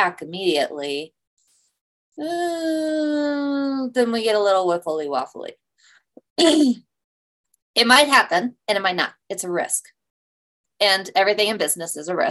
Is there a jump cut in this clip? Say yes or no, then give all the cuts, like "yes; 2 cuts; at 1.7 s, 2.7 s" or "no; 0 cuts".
no; 0 cuts